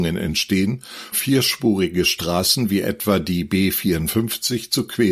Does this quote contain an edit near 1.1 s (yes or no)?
yes